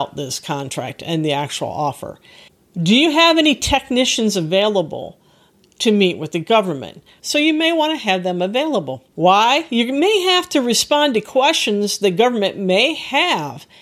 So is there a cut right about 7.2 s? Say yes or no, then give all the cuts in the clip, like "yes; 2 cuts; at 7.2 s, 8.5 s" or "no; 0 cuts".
yes; 2 cuts; at 7.2 s, 9.1 s